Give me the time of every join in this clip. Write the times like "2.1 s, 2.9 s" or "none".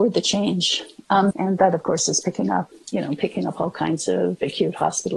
1.3 s, 2.7 s